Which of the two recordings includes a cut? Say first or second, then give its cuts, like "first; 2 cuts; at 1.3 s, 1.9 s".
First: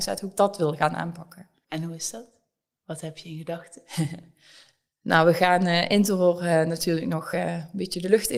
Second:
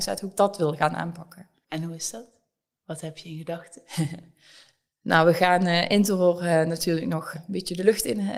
second; 1 cut; at 7.3 s